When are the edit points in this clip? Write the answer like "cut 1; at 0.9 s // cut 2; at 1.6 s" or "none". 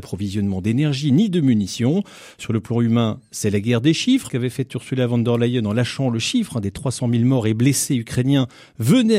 cut 1; at 4.3 s